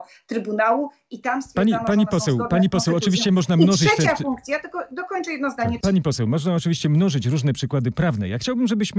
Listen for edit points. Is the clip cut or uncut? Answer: cut